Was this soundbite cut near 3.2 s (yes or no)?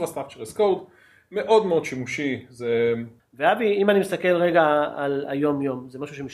yes